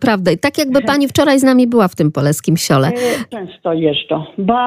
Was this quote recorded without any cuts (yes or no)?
no